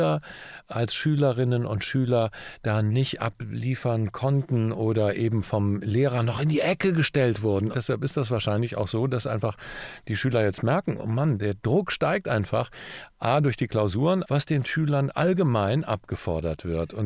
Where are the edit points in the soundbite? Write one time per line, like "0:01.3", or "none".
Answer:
0:07.7
0:14.2